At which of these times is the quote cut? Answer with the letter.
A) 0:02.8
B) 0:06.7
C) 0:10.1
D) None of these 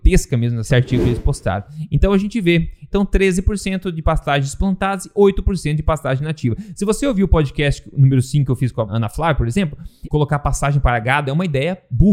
C